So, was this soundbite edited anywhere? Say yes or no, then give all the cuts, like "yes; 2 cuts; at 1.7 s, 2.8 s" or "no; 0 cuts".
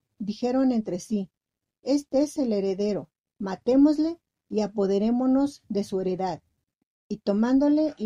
yes; 1 cut; at 3.2 s